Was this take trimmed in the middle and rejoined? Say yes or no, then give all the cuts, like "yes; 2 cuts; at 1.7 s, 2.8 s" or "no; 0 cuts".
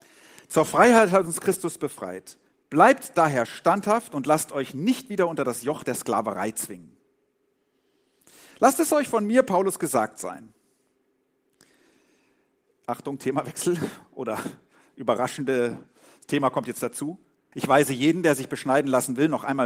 yes; 1 cut; at 17.5 s